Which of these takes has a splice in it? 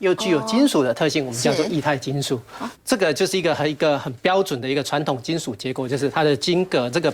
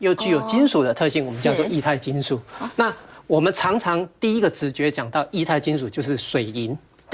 first; 1 cut; at 2.7 s

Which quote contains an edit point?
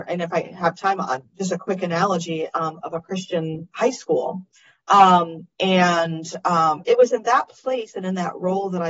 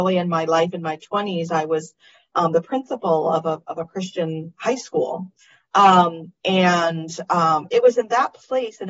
first; 1 cut; at 2.8 s

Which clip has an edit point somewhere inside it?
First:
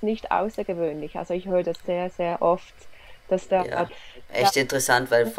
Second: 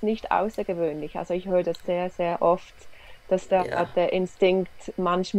first; 1 cut; at 3.9 s

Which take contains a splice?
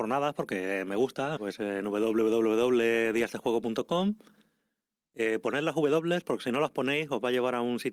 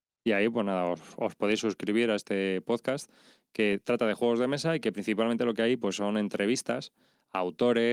first; 1 cut; at 1.4 s

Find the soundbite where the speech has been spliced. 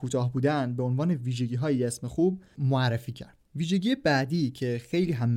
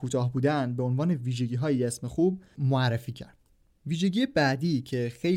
first; 1 cut; at 3.4 s

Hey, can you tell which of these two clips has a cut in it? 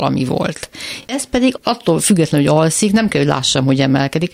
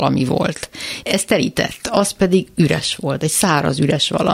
second; 1 cut; at 1.0 s

